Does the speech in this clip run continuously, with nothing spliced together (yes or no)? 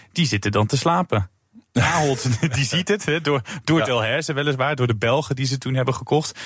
yes